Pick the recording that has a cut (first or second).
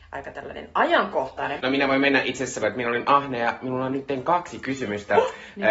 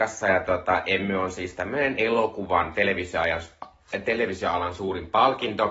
first